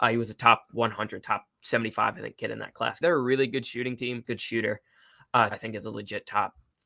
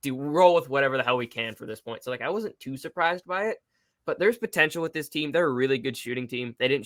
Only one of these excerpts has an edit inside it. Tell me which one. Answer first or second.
first